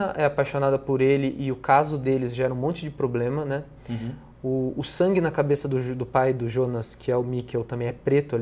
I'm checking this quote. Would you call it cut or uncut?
uncut